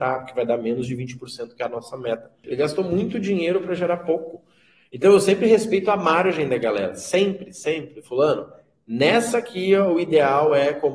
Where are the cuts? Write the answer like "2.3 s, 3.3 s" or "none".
2.4 s